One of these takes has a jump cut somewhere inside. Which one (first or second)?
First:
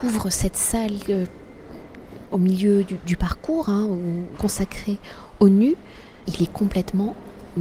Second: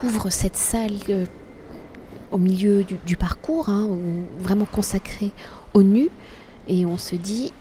first